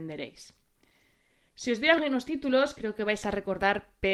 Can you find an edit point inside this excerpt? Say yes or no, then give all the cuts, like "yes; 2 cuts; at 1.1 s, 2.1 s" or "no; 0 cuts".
no; 0 cuts